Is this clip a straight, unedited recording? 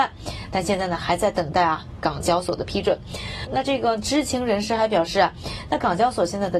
yes; 0 cuts

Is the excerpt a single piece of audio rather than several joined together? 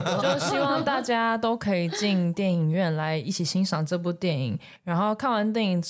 yes; 0 cuts

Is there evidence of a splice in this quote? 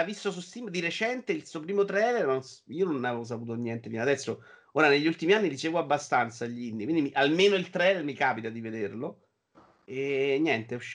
no; 0 cuts

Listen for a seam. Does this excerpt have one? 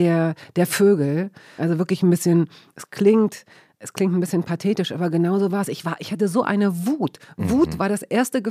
yes; 1 cut; at 1.6 s

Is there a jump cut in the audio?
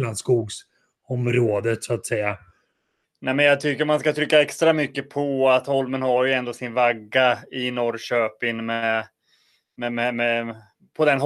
yes; 1 cut; at 3.0 s

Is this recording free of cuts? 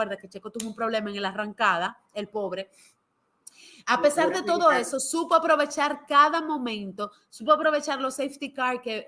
yes; 0 cuts

